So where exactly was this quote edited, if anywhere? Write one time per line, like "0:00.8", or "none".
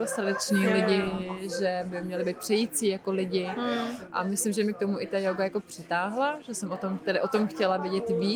none